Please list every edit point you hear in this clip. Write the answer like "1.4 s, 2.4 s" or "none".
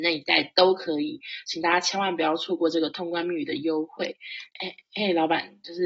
4.5 s

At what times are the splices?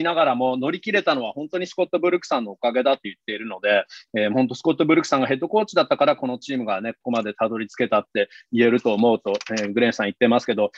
none

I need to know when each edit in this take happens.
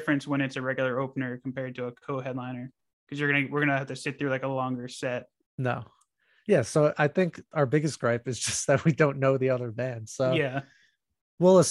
5.5 s

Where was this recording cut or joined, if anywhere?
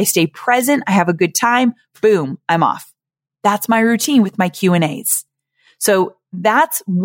none

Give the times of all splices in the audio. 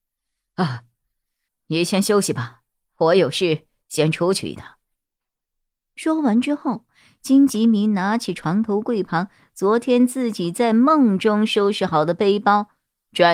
1.5 s

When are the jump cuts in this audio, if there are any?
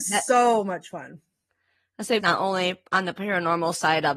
2.2 s

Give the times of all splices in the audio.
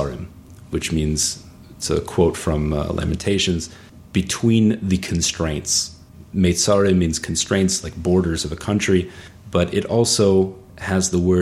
none

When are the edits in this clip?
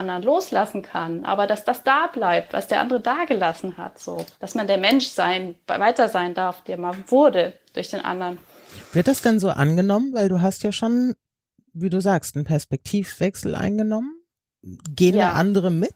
none

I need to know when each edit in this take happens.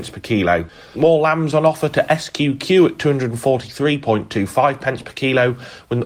0.9 s

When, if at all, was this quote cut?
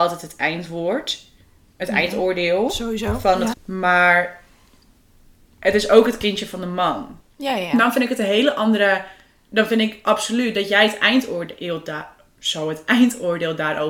3.5 s, 7.2 s

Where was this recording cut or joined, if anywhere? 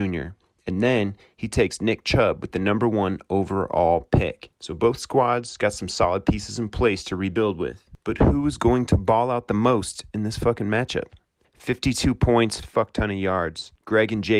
11.4 s, 12.6 s

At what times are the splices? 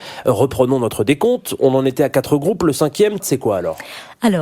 3.2 s

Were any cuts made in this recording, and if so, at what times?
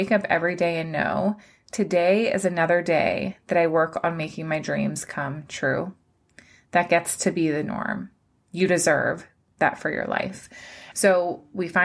10.9 s

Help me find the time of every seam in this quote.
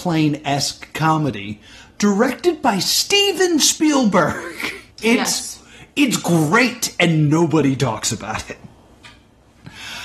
4.9 s

